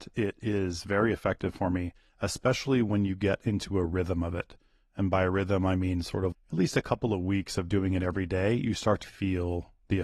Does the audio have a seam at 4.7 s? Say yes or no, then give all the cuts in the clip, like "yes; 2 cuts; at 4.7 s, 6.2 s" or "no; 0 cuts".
no; 2 cuts; at 6.3 s, 9.0 s